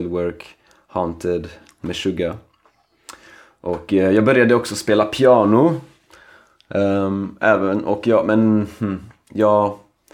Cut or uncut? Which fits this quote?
uncut